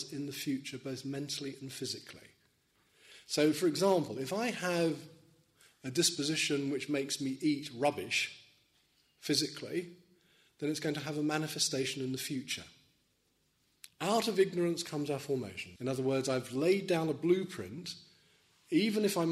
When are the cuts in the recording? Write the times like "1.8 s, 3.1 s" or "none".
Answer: 13.9 s, 15.8 s